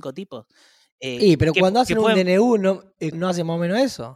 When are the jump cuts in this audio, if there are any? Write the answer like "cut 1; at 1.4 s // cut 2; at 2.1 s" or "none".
cut 1; at 3.1 s